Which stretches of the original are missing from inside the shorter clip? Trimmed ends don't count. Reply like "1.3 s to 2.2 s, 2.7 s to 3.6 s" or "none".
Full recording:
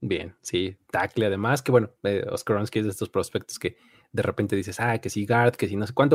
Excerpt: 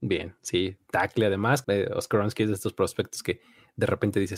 1.6 s to 2.0 s